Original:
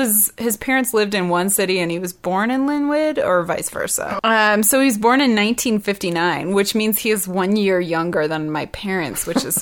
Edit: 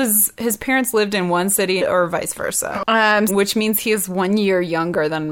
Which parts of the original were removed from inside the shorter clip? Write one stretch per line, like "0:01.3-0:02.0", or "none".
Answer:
0:01.8-0:03.1
0:04.6-0:06.5